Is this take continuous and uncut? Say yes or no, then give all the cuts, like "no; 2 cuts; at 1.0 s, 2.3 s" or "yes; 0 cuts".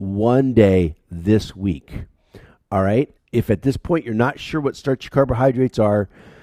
no; 1 cut; at 3.2 s